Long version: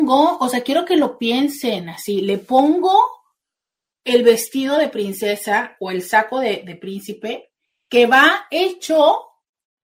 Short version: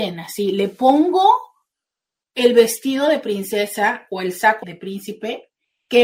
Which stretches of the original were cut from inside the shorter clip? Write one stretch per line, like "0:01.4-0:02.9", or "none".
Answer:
0:06.3-0:06.6